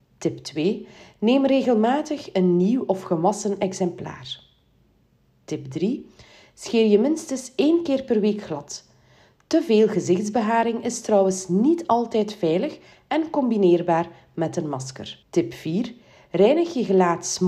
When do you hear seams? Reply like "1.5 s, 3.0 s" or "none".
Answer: 15.2 s